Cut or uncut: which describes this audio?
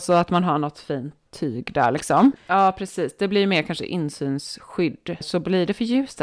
cut